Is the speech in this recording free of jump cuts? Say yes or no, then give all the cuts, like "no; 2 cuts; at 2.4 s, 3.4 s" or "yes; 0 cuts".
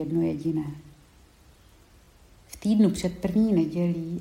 yes; 0 cuts